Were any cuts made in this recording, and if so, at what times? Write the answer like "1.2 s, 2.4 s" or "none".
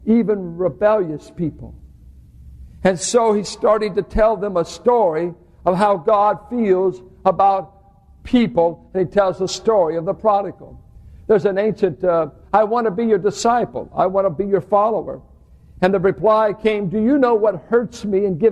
12.4 s